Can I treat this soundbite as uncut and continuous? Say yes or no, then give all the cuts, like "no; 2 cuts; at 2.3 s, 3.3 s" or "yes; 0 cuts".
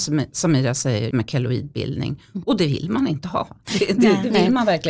no; 1 cut; at 1.1 s